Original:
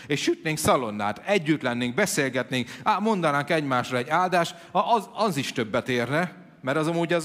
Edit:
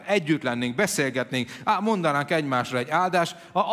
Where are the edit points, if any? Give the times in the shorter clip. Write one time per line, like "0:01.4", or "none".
none